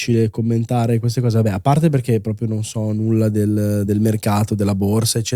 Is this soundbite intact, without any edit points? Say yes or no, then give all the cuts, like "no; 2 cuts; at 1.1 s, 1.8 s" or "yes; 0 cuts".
yes; 0 cuts